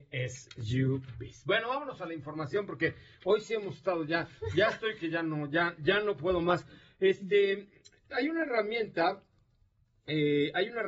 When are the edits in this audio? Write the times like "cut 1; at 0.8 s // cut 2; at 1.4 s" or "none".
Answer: cut 1; at 8.1 s